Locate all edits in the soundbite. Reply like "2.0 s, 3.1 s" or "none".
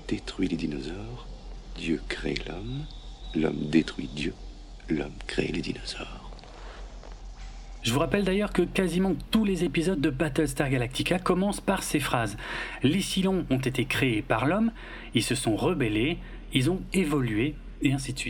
7.8 s